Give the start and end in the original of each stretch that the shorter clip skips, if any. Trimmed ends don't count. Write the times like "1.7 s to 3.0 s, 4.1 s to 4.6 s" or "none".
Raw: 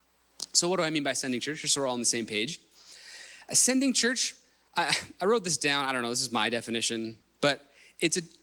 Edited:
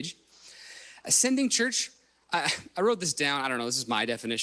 none